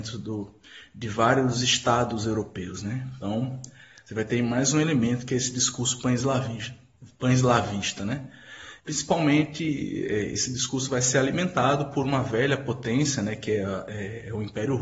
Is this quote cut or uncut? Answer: cut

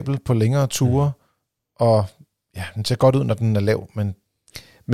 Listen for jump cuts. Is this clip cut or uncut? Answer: uncut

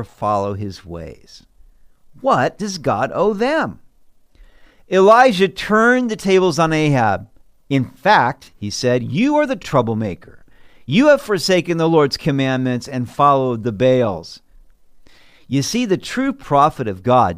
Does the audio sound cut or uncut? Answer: uncut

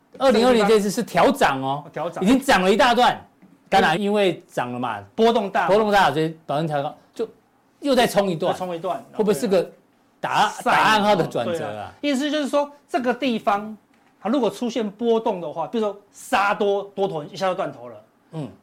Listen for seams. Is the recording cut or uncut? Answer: cut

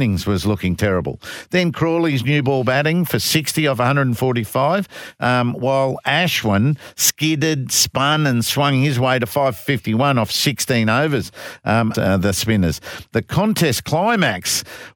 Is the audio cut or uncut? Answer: cut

